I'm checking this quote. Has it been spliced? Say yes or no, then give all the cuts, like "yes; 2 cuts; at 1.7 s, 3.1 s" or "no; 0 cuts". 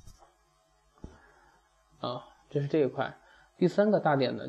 no; 0 cuts